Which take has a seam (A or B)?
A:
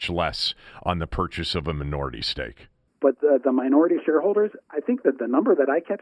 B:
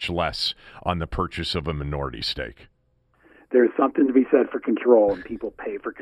A